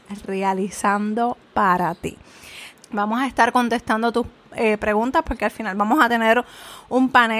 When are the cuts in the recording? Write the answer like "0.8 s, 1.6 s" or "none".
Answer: 2.7 s